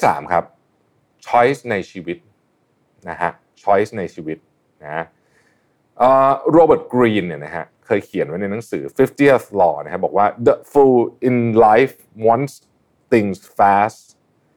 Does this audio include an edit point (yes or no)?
no